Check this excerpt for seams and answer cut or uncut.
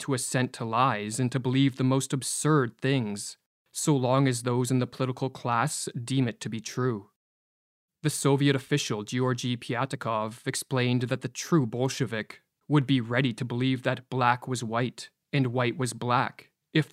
uncut